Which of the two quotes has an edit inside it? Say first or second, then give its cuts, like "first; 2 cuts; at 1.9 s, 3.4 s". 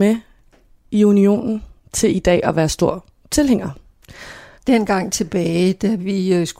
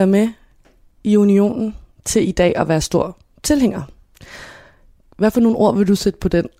first; 1 cut; at 4.6 s